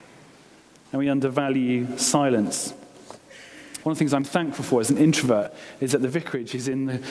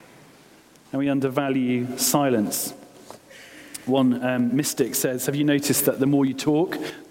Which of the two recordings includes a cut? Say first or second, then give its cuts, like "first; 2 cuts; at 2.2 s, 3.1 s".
first; 1 cut; at 3.8 s